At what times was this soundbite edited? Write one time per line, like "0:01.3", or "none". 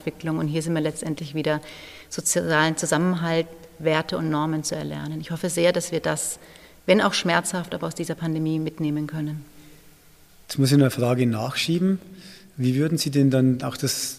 none